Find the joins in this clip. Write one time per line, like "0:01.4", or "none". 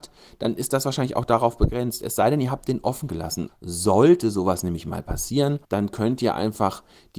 0:03.5
0:05.6